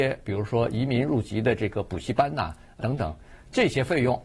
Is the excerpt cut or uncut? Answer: cut